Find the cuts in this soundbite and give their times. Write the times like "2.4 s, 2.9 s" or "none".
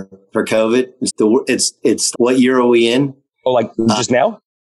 1.1 s, 2.1 s